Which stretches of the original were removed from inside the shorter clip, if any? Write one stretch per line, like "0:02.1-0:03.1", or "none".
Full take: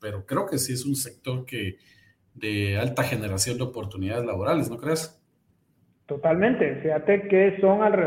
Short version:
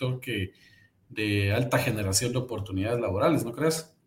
none